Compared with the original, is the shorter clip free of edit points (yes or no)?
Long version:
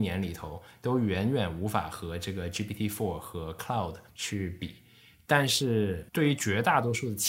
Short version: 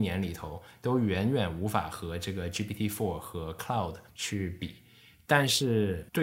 yes